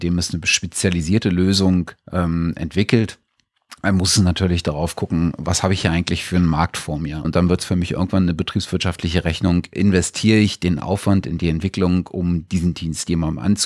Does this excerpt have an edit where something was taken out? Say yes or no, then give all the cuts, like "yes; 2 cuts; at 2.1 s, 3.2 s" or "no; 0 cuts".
yes; 1 cut; at 7.2 s